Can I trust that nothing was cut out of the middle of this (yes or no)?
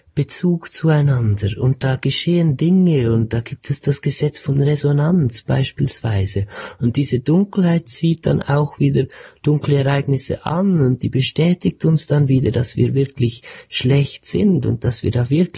no